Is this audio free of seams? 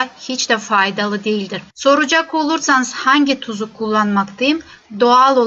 yes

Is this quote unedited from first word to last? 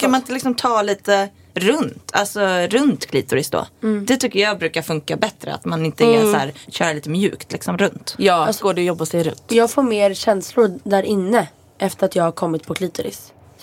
no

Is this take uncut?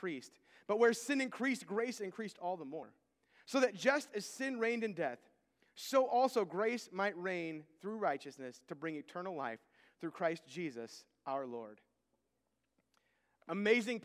yes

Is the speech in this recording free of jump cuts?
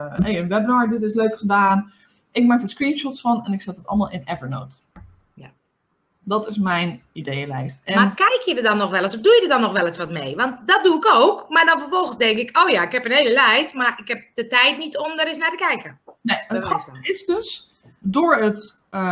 no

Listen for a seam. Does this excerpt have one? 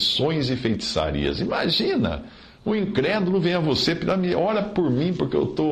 no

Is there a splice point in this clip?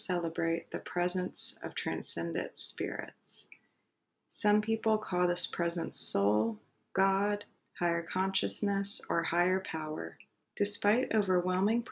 yes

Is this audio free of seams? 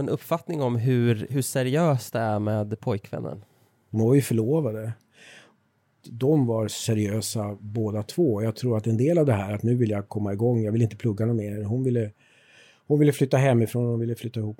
yes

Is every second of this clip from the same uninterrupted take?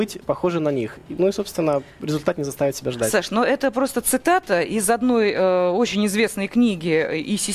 yes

